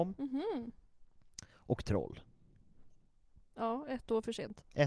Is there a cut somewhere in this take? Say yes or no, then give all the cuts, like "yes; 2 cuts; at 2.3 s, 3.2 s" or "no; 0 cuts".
no; 0 cuts